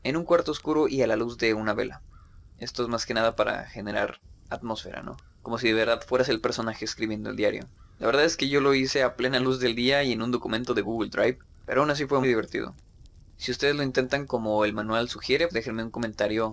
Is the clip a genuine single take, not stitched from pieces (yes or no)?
no